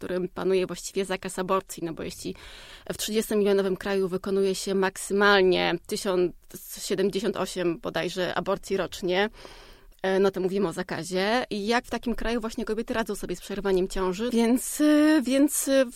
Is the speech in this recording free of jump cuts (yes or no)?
no